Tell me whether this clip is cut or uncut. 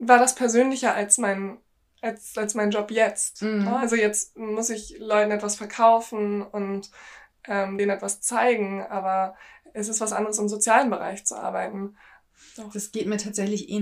uncut